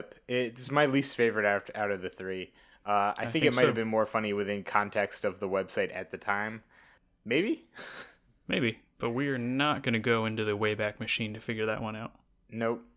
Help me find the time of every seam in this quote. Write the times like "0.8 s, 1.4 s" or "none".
none

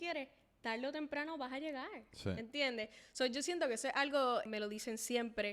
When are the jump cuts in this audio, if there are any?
4.5 s

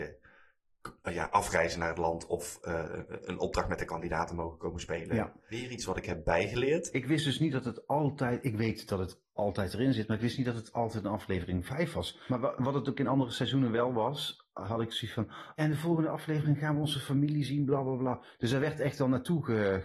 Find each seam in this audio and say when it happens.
15.6 s

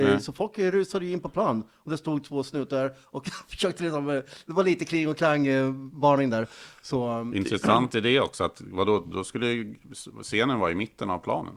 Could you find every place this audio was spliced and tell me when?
none

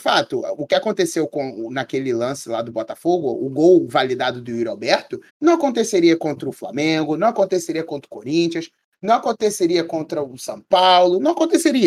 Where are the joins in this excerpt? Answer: 5.3 s

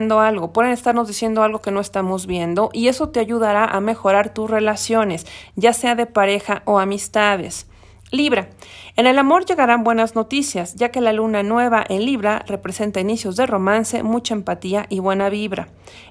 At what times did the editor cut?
none

